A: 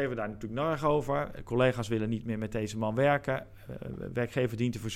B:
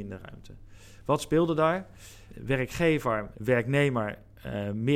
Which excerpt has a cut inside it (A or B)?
B